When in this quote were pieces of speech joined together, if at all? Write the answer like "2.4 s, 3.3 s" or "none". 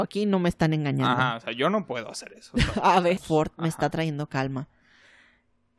3.2 s